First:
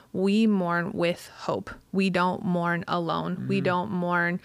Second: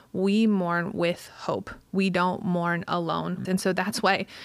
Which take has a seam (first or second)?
second